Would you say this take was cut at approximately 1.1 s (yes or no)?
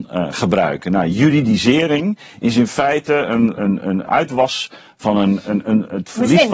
no